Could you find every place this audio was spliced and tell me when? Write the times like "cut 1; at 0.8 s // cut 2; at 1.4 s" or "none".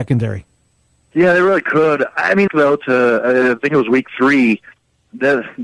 cut 1; at 2.5 s